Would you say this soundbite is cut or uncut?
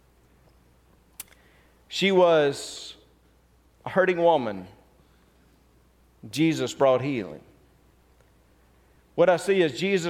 uncut